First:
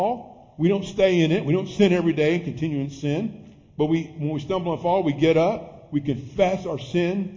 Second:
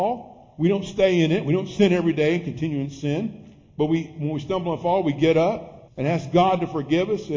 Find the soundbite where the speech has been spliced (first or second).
second